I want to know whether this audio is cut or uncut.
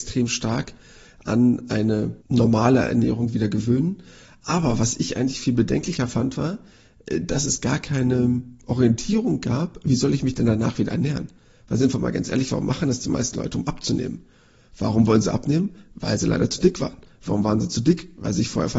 cut